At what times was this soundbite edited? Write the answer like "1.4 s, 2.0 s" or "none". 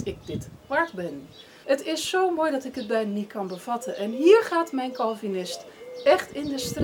1.6 s